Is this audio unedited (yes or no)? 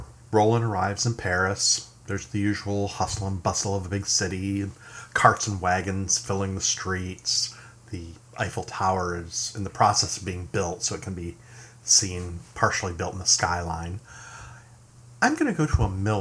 yes